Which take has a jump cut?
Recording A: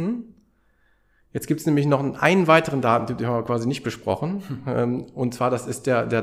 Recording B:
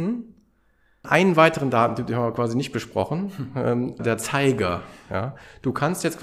B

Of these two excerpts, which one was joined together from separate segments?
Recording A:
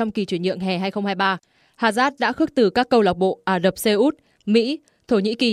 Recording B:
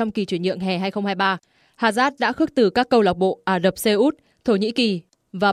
B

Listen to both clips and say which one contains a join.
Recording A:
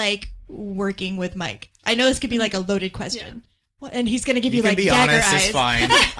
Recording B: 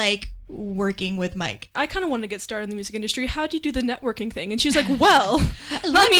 B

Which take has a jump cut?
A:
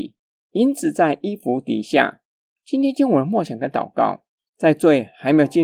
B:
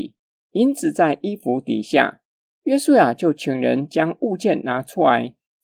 A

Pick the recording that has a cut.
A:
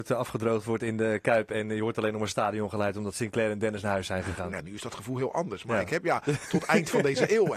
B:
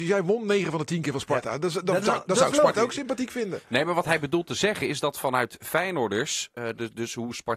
A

